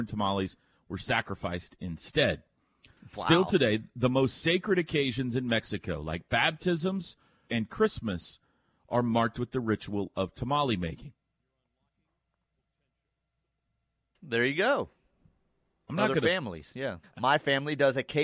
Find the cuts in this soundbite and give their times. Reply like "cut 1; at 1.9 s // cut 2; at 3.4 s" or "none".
cut 1; at 7.5 s // cut 2; at 15.8 s // cut 3; at 17.0 s